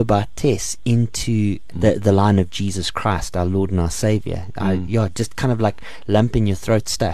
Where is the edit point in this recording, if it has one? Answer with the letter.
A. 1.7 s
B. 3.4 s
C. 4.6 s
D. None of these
A